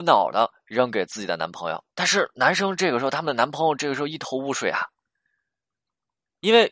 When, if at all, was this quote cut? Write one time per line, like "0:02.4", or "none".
0:01.9